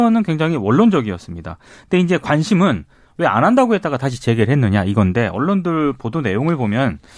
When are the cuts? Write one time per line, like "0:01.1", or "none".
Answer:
none